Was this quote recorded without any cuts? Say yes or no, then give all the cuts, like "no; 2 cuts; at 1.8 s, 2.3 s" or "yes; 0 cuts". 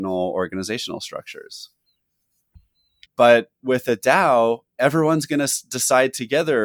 no; 1 cut; at 3.1 s